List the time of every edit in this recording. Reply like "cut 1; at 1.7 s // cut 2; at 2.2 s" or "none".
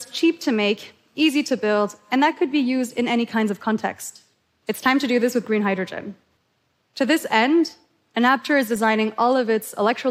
none